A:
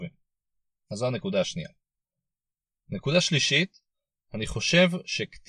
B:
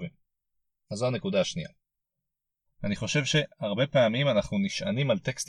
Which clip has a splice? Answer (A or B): B